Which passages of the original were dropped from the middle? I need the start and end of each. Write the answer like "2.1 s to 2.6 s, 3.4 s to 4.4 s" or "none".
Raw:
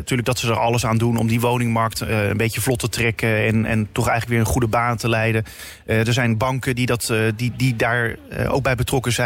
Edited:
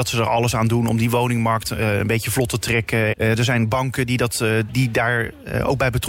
3.4 s to 5.8 s, 7.4 s to 7.5 s